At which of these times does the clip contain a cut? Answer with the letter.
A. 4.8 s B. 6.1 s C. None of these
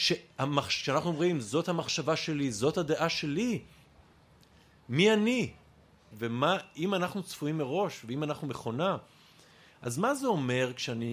B